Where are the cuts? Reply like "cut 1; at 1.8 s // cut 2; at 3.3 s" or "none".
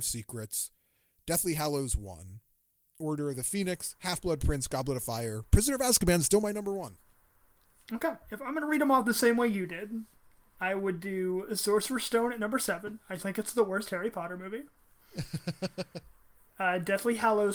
cut 1; at 13.2 s